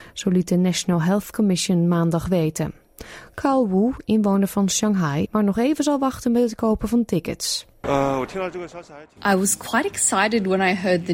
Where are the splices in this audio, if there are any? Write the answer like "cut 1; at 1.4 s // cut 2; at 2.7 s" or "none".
cut 1; at 5.3 s